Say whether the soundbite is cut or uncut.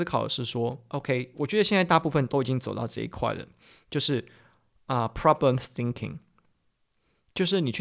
uncut